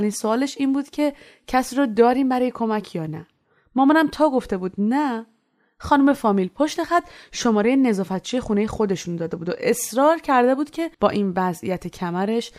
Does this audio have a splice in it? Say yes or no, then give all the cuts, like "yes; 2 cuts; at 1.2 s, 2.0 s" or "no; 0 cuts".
yes; 1 cut; at 10.9 s